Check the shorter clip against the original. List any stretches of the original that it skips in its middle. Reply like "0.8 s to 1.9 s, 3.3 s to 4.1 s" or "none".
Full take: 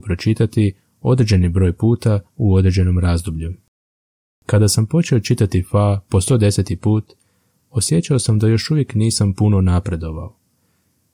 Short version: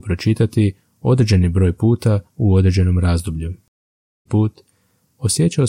4.3 s to 6.8 s